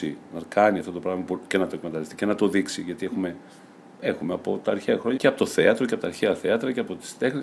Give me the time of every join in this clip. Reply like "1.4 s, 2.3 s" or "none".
5.2 s